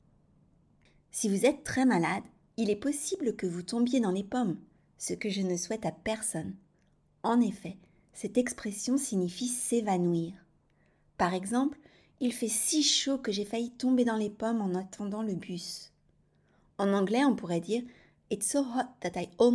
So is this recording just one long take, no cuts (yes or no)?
yes